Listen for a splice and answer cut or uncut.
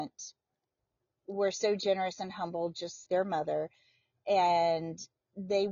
cut